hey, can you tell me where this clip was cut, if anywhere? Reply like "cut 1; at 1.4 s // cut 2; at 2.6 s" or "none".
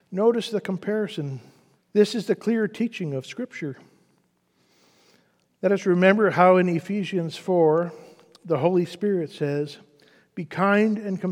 cut 1; at 1.7 s